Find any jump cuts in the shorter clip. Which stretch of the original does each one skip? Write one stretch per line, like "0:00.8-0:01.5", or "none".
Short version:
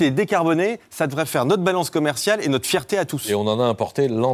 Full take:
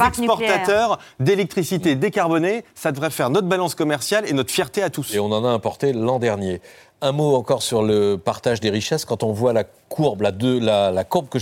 none

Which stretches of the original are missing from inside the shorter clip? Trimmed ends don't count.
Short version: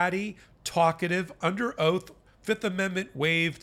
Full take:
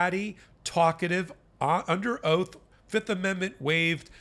0:01.4-0:01.9

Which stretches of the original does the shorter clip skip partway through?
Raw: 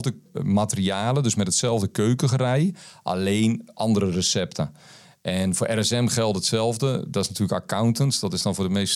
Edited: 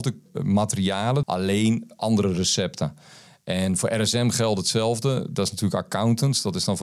0:01.2-0:03.0

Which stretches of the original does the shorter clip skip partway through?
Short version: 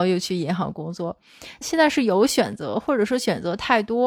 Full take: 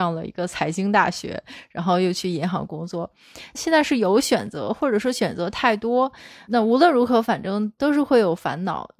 none

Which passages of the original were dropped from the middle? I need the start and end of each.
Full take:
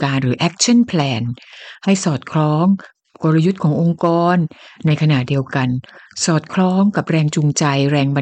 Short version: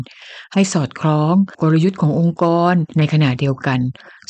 0:02.9-0:03.2
0:04.5-0:04.8

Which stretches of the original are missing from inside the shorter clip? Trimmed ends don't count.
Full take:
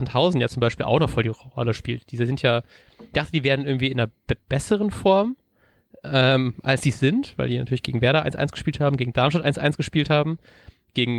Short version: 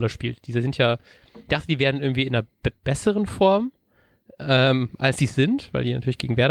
none

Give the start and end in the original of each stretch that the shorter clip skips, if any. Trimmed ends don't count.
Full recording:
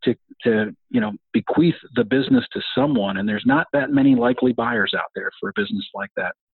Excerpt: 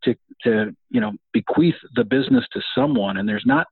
none

